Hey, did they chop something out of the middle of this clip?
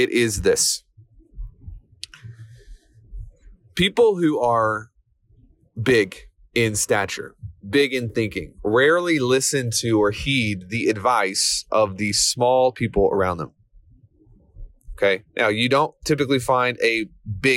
yes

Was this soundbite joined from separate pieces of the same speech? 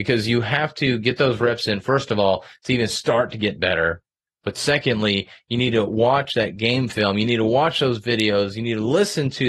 no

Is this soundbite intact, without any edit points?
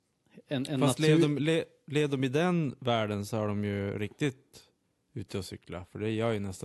yes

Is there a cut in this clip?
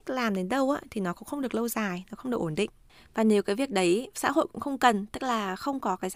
no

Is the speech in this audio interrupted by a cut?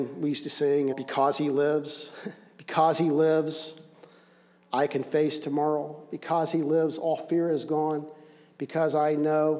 yes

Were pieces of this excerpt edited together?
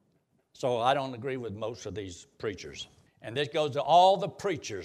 yes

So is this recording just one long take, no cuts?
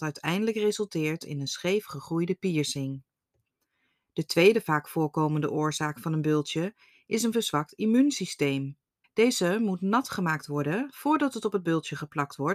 no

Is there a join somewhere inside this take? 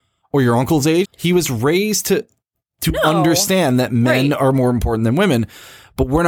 yes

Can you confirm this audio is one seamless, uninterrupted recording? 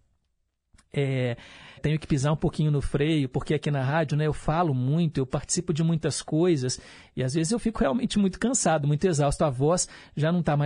no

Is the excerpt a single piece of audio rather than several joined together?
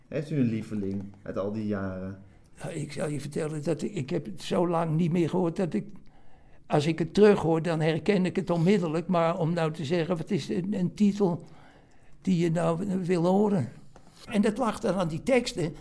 no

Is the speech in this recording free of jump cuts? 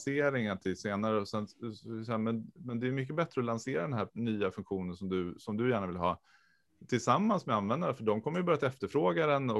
yes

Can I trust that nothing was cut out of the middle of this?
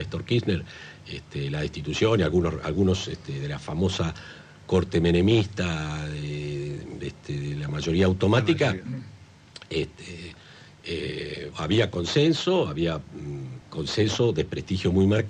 no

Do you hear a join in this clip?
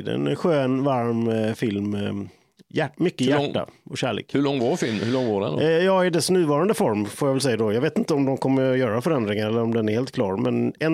no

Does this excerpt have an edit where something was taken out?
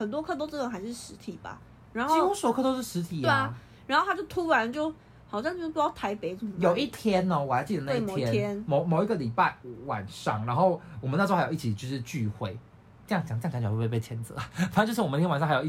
no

